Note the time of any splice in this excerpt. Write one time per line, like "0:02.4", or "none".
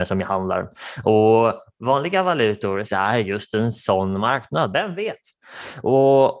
0:02.9
0:04.7